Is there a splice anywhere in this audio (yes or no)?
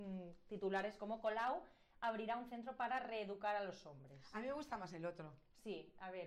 no